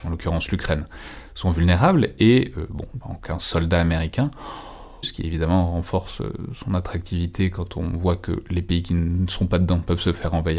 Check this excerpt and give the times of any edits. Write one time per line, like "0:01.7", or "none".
0:03.0
0:05.0